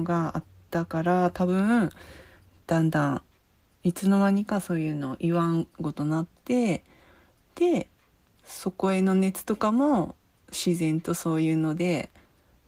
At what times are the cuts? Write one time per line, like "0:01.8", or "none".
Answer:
0:02.7
0:05.7